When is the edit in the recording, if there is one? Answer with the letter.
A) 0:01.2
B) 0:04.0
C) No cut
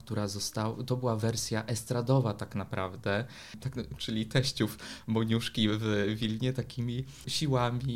B